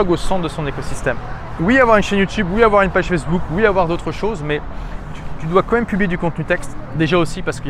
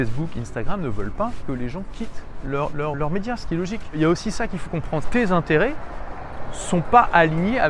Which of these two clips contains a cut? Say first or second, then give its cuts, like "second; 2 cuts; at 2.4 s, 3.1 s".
second; 2 cuts; at 2.9 s, 5.0 s